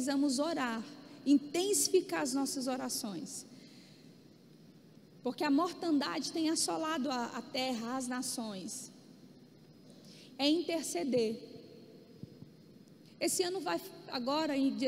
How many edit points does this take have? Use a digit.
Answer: 1